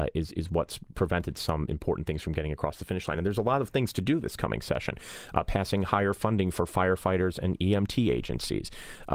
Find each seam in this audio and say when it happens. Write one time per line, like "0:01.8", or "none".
none